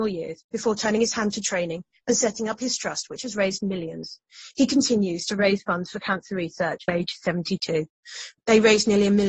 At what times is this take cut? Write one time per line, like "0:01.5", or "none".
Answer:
0:06.9
0:08.4